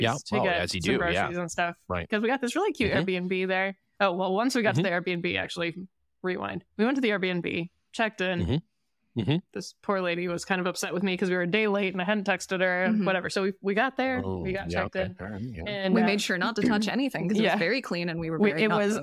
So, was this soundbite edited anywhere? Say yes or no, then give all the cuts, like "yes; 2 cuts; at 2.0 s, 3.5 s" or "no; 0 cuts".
no; 0 cuts